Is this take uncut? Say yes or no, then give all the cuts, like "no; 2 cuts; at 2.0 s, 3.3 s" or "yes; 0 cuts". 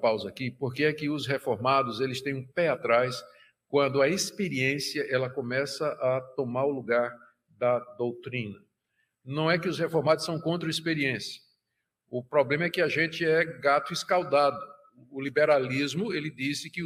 yes; 0 cuts